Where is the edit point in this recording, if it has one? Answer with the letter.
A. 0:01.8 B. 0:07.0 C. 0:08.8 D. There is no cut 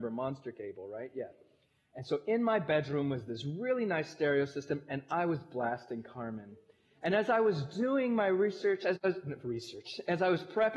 A